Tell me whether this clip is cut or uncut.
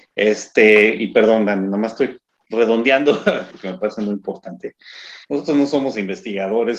cut